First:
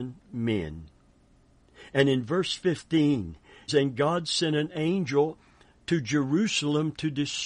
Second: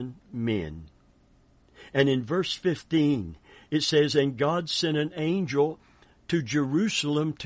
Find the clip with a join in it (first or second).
first